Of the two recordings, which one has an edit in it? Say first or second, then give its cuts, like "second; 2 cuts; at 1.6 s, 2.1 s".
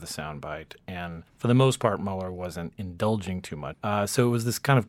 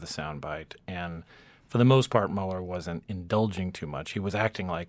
first; 2 cuts; at 1.3 s, 3.7 s